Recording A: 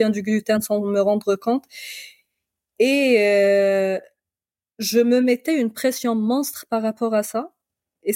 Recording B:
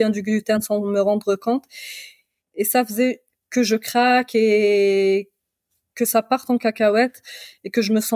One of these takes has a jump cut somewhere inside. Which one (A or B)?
B